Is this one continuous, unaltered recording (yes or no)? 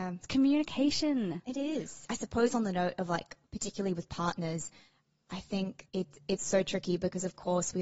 no